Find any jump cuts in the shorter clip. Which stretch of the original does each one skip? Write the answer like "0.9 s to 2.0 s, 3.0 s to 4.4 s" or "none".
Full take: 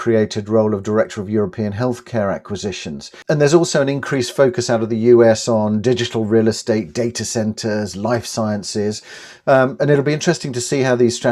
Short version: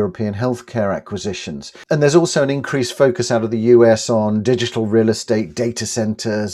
none